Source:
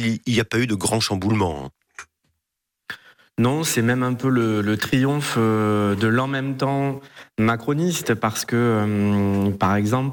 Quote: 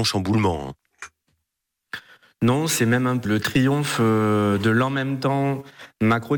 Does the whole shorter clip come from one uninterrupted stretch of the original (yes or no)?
no